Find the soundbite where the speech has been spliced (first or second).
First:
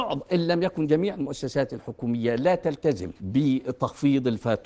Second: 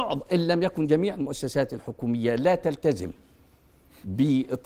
first